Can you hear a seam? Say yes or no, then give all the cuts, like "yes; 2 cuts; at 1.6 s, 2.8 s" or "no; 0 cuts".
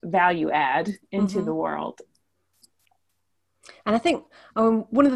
no; 0 cuts